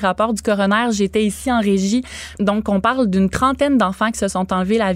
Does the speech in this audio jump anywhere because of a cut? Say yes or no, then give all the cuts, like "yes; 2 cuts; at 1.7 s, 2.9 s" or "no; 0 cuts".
yes; 1 cut; at 2.4 s